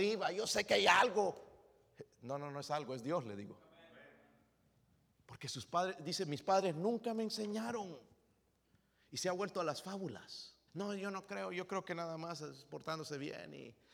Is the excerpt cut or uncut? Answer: cut